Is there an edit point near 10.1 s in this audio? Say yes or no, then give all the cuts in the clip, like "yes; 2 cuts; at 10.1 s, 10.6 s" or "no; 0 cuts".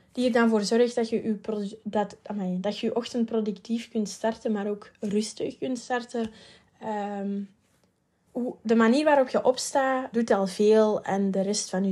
yes; 2 cuts; at 8.3 s, 10.1 s